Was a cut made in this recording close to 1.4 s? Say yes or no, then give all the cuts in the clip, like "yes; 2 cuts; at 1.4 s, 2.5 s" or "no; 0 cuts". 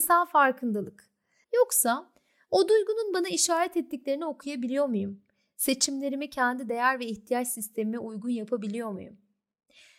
yes; 1 cut; at 1.4 s